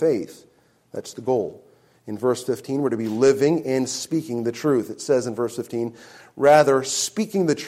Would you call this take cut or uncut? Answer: uncut